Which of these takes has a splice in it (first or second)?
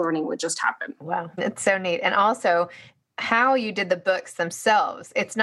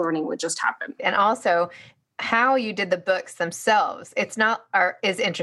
second